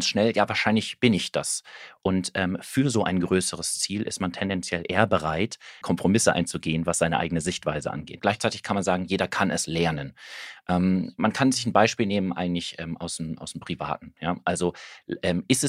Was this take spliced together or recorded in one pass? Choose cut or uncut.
cut